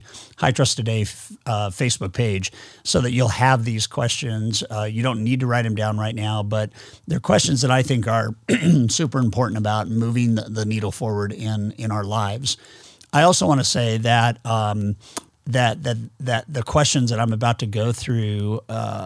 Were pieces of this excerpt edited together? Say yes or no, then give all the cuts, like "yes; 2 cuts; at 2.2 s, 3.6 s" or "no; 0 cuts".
no; 0 cuts